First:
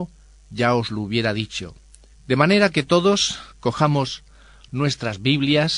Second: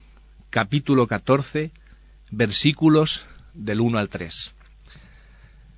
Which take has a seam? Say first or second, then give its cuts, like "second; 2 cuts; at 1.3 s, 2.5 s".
first; 2 cuts; at 2.1 s, 3.5 s